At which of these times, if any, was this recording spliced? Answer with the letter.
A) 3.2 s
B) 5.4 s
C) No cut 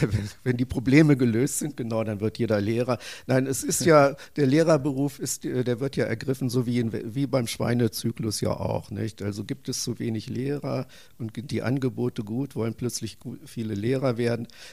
C